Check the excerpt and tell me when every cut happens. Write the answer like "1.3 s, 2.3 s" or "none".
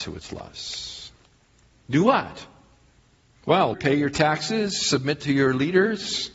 1.7 s, 3.7 s